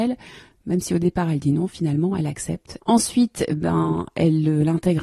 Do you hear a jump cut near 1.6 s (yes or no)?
no